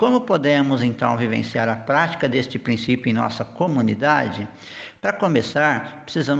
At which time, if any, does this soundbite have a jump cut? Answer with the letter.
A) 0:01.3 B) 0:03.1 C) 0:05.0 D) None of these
D